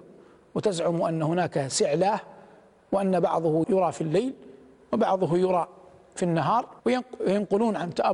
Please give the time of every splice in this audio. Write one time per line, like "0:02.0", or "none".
0:03.6
0:06.8